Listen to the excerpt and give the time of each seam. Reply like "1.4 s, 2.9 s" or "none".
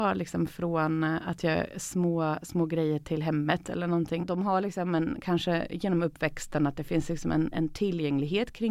4.2 s, 7.5 s